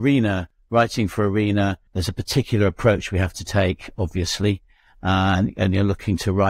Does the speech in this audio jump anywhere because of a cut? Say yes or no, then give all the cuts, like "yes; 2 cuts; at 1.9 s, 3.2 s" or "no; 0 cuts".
yes; 1 cut; at 1.9 s